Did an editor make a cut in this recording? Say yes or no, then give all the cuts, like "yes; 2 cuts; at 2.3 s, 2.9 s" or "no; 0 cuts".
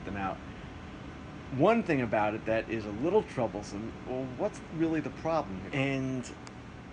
yes; 2 cuts; at 4.1 s, 5.7 s